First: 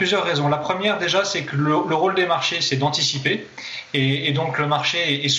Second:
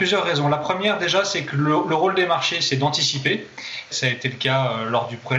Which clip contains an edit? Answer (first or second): second